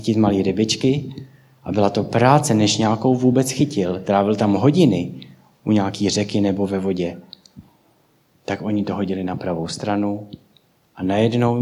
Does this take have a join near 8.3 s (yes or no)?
yes